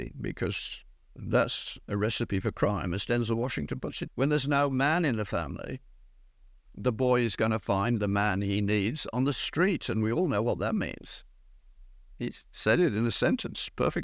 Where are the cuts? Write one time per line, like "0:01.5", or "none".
0:01.8
0:04.1